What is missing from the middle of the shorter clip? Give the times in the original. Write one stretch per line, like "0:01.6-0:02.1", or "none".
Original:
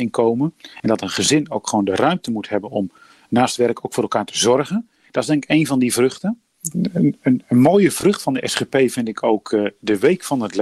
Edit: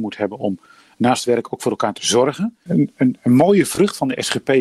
0:05.0-0:06.9